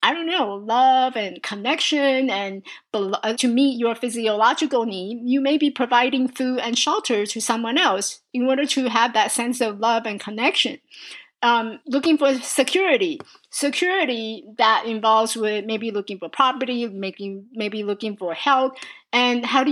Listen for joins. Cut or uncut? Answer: cut